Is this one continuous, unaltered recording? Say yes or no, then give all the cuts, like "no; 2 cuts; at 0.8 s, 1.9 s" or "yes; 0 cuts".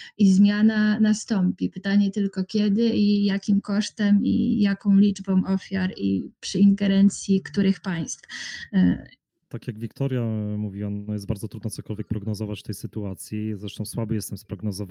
no; 1 cut; at 9.3 s